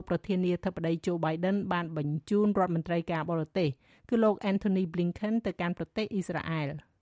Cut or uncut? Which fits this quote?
uncut